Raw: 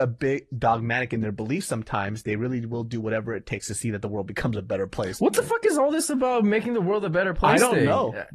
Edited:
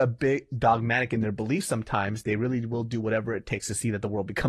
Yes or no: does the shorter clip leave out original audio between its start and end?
no